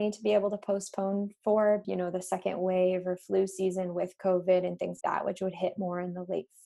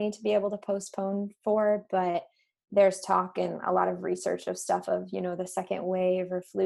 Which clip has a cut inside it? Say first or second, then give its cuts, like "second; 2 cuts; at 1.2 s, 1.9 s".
first; 2 cuts; at 1.8 s, 5.0 s